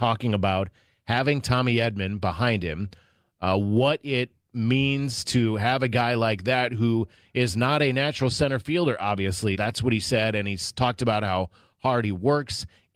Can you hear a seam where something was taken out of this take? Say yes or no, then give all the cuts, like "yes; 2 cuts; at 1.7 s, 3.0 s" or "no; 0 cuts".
yes; 1 cut; at 9.5 s